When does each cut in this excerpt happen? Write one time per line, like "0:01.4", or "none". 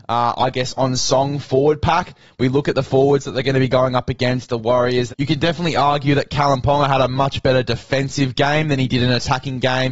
0:05.1